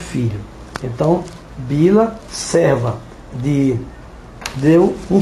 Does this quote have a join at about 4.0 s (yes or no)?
no